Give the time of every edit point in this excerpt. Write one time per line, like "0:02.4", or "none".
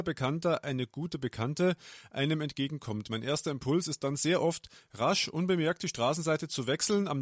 none